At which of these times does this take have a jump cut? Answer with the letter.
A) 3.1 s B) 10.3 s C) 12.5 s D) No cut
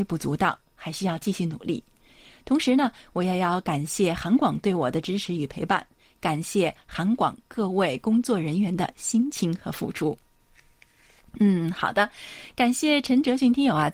D